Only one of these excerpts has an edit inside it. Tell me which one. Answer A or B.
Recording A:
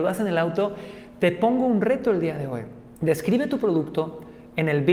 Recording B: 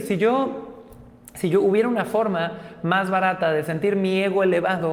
A